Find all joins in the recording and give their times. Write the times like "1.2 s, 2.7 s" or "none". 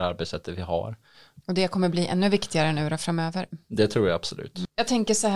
1.4 s